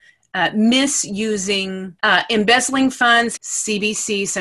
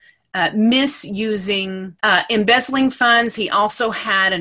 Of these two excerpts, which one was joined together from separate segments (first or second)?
first